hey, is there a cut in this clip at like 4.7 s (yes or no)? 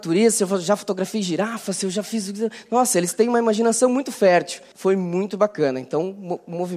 yes